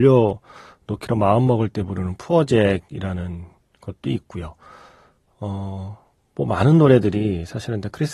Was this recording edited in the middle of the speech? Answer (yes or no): no